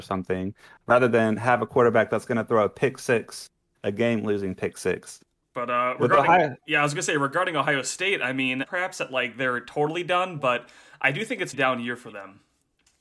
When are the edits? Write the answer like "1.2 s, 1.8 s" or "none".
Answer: 5.4 s, 8.6 s, 11.5 s